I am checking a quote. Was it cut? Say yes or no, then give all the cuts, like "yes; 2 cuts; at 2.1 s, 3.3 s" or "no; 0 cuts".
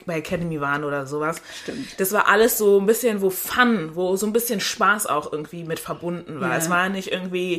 no; 0 cuts